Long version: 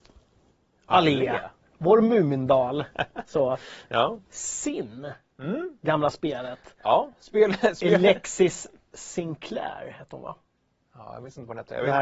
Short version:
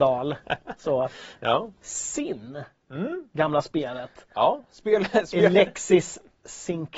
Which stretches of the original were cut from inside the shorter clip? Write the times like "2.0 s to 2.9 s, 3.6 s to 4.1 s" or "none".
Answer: none